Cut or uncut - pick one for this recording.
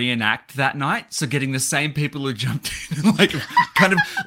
uncut